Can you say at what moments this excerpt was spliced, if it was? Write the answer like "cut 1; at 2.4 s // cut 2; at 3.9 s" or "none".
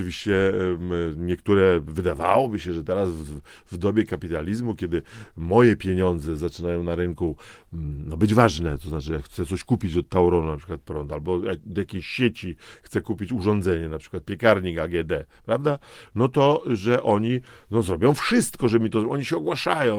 none

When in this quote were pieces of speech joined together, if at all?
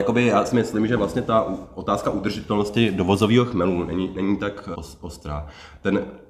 cut 1; at 4.7 s

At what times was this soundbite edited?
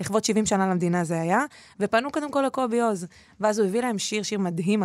none

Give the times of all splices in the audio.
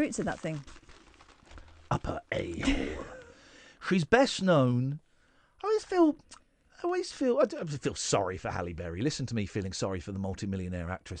none

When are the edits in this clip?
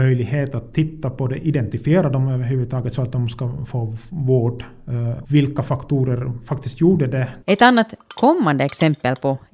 cut 1; at 5.2 s // cut 2; at 7.4 s

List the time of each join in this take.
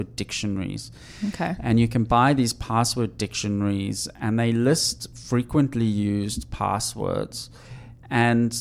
none

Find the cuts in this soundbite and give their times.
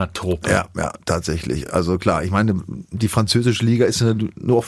none

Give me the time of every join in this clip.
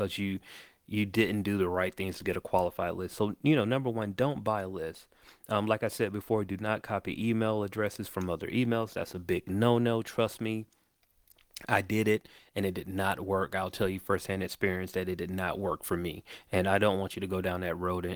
none

